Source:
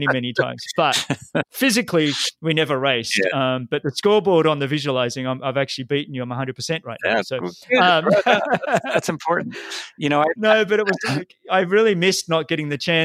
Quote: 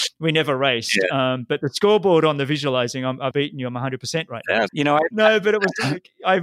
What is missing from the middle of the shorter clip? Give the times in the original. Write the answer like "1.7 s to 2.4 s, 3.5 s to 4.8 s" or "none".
5.5 s to 5.9 s, 7.2 s to 9.9 s

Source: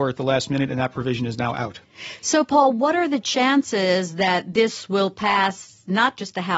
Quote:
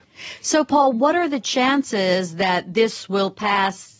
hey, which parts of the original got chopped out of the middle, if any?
none

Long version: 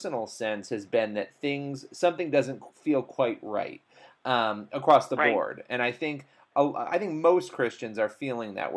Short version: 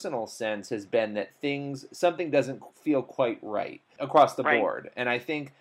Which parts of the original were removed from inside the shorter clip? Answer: 4.0 s to 4.7 s

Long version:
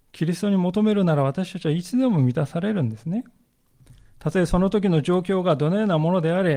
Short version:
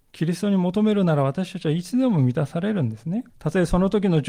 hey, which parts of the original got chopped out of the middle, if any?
3.3 s to 4.1 s

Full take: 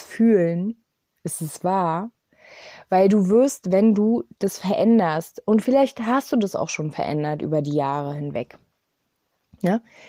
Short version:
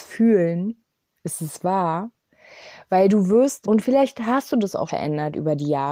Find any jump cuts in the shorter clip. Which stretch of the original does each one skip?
3.6 s to 5.4 s, 6.7 s to 6.9 s

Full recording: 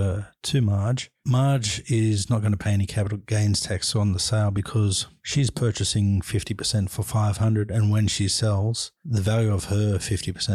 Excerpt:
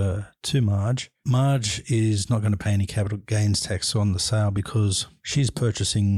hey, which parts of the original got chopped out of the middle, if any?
none

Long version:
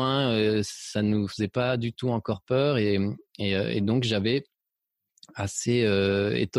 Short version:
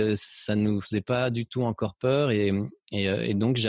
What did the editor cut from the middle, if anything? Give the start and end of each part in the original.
none

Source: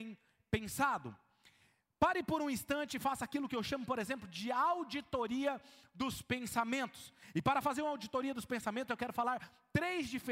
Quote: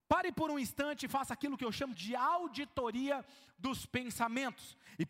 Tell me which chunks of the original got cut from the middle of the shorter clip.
3.9 s to 4.3 s

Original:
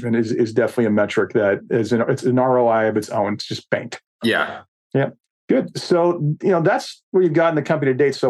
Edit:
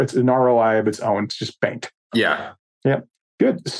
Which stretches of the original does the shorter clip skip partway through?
none

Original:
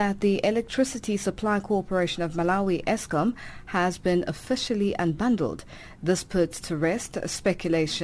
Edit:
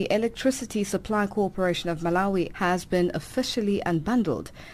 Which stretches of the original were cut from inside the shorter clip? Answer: 2.8 s to 3.6 s

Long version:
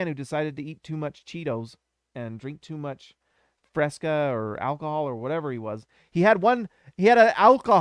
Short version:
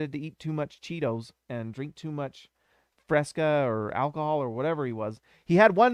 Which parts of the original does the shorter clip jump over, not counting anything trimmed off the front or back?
1.8 s to 2.1 s

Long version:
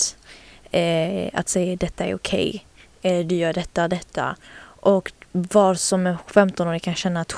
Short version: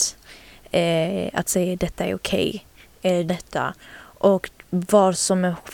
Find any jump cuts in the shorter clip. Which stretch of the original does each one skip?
3.3 s to 3.9 s

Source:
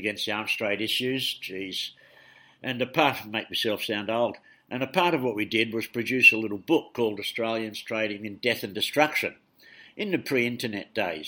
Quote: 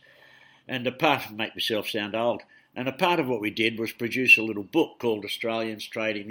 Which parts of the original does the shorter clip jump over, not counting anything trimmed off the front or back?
none

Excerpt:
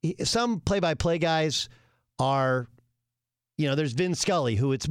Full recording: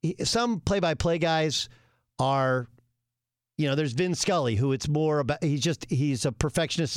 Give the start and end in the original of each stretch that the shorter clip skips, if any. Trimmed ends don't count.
none

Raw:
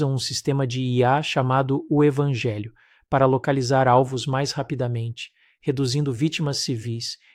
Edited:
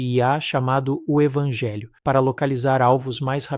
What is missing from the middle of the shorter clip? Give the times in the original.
2.8 s to 3.0 s

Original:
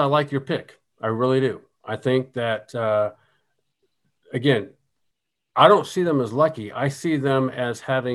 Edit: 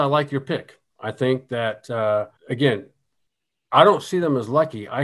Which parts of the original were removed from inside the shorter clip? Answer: 0.9 s to 1.8 s, 3.2 s to 4.2 s

